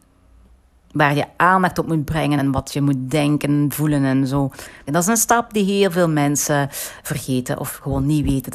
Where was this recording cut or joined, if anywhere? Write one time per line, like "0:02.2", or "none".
0:02.4
0:04.9
0:07.0